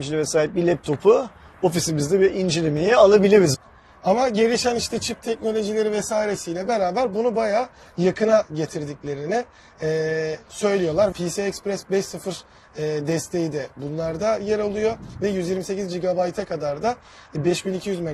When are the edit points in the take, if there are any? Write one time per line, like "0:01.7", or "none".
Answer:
0:03.5
0:11.1